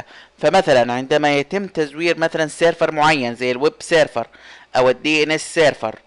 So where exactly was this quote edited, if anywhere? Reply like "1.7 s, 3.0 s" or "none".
none